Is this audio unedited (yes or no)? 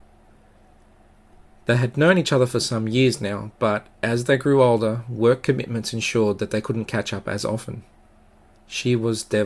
no